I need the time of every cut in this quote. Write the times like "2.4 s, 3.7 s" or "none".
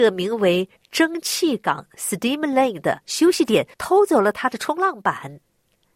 3.7 s

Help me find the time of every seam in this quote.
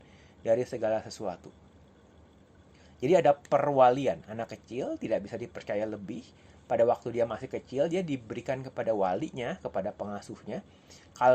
none

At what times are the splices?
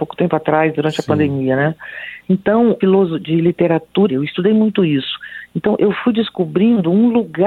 2.8 s, 4.1 s

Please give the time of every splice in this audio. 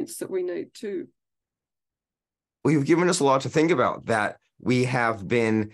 none

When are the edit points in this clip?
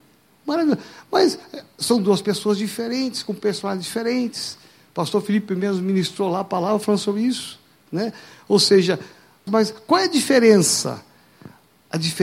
9.5 s

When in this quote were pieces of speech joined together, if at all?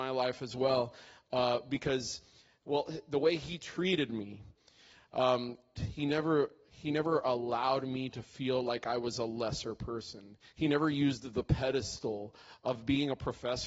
5.7 s

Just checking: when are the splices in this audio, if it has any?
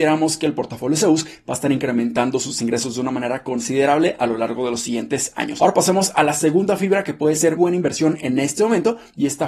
7.6 s

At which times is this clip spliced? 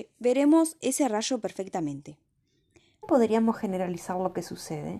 3.0 s

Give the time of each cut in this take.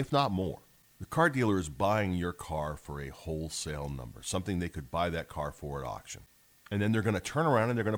none

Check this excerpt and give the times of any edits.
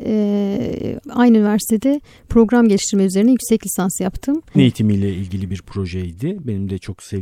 1.0 s, 4.5 s

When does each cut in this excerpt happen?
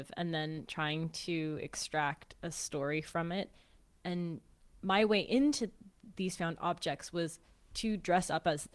none

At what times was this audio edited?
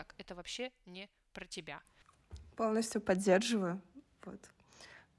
none

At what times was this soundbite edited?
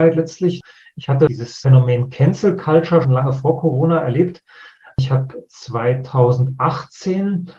3.0 s

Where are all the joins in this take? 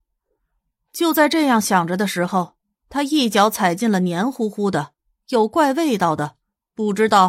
none

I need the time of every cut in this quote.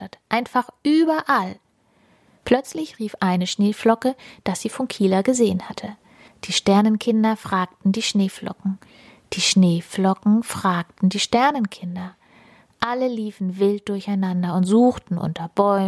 6.3 s

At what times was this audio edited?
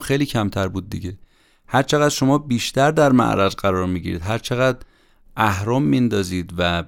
none

